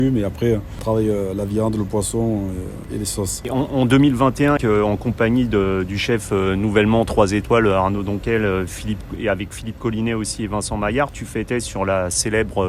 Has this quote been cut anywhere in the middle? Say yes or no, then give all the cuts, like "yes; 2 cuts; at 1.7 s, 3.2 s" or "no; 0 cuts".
yes; 1 cut; at 4.6 s